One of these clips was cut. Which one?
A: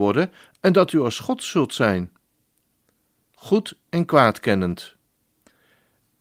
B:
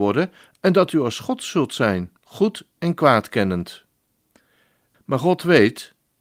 B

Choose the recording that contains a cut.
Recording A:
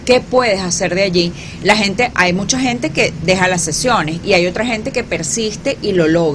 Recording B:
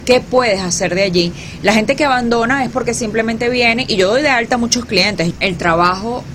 B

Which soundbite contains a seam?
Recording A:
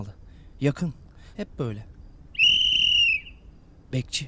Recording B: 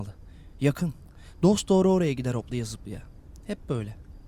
A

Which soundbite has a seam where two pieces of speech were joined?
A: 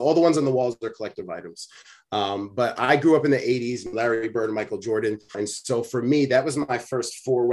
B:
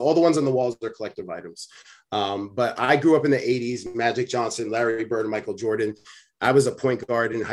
A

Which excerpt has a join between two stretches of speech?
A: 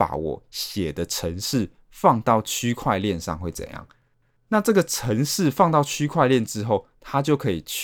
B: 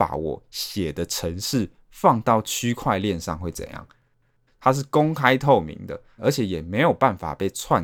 B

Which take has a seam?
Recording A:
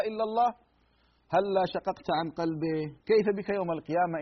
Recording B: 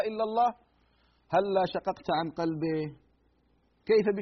A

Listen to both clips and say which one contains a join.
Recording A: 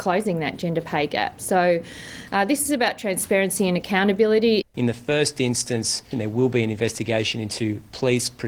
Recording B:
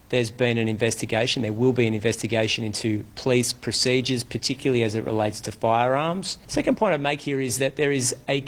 A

